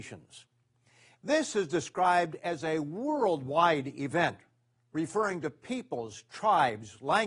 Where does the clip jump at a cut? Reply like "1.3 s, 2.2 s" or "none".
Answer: 1.1 s